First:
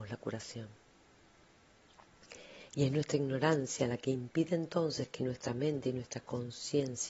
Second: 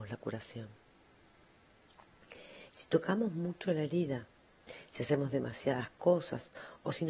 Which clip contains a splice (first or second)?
second